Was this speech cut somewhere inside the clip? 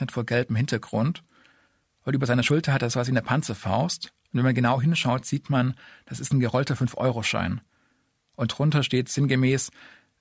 no; 0 cuts

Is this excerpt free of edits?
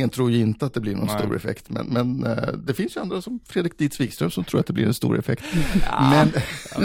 yes; 0 cuts

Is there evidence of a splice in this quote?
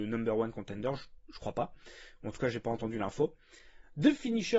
no; 0 cuts

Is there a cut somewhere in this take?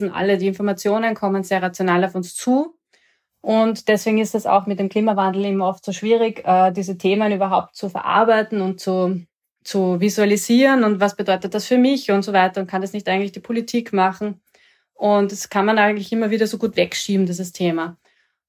no; 0 cuts

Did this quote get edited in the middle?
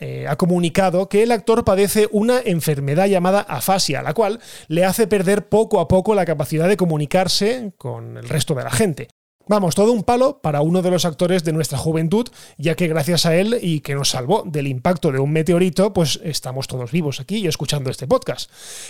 no; 0 cuts

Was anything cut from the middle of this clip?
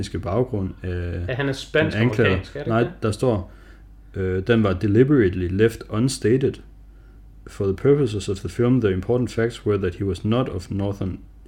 no; 0 cuts

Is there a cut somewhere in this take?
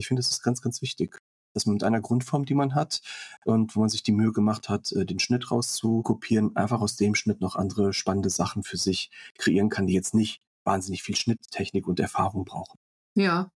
no; 0 cuts

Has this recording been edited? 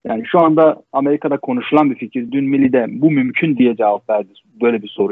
no; 0 cuts

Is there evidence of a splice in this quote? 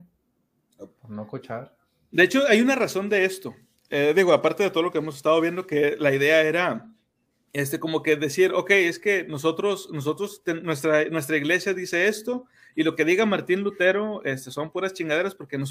no; 0 cuts

